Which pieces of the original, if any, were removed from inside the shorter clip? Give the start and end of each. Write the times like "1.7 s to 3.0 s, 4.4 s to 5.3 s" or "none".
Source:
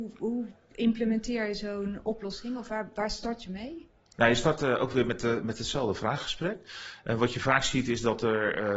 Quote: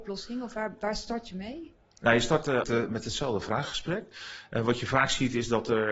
4.8 s to 5.2 s